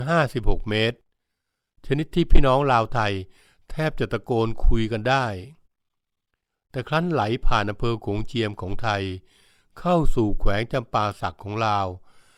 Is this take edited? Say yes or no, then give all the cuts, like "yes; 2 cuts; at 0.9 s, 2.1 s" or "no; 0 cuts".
no; 0 cuts